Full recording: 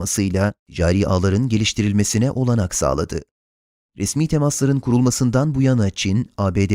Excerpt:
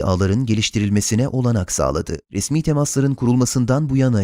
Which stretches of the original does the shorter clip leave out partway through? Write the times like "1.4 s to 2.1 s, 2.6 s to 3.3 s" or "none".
3.3 s to 3.9 s